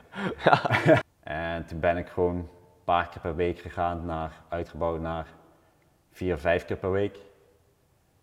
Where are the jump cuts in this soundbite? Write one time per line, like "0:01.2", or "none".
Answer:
0:01.0